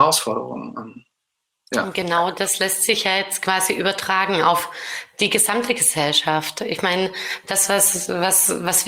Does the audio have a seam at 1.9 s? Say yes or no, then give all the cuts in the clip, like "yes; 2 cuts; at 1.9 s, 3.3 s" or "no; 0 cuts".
no; 0 cuts